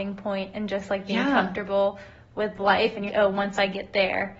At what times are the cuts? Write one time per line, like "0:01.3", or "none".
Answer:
0:03.1